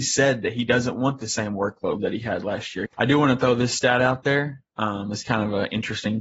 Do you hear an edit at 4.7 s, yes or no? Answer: no